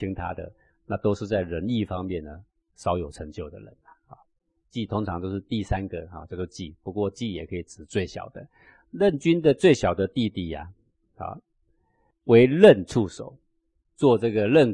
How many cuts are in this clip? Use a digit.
1